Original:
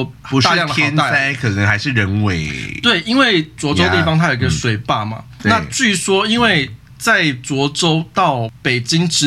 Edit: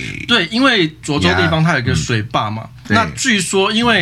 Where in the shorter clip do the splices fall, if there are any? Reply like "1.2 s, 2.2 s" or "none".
none